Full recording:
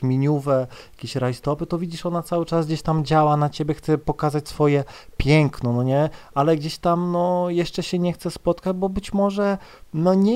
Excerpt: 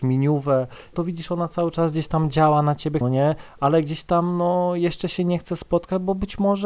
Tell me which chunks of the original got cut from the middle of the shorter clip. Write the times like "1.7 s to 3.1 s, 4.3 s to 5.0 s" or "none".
0.9 s to 1.7 s, 3.8 s to 5.8 s